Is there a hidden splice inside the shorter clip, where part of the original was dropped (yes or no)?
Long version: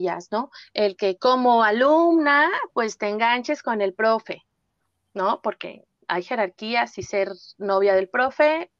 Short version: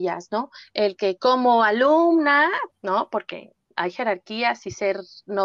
yes